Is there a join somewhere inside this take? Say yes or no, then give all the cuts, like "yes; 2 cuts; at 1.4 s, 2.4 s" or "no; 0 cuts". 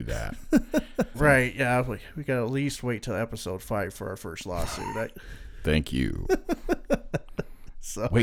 yes; 1 cut; at 1.1 s